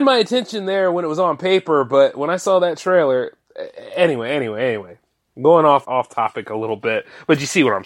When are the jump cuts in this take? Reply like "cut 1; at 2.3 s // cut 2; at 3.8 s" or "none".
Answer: cut 1; at 5.8 s